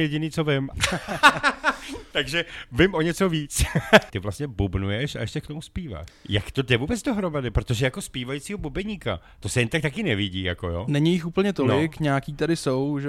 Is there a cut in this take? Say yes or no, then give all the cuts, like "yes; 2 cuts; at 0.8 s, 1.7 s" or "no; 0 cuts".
yes; 2 cuts; at 4.1 s, 6.1 s